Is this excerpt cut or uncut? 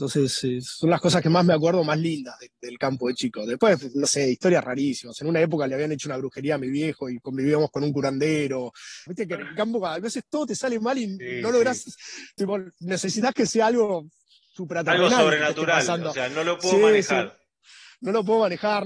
cut